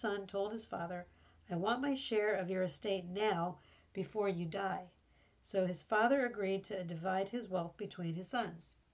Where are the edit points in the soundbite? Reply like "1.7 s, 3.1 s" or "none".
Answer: none